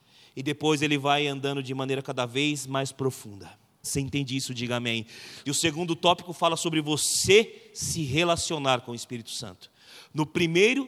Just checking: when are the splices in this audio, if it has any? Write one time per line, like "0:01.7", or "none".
0:03.8
0:05.4